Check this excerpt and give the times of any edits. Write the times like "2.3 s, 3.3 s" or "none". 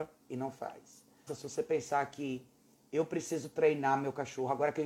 1.3 s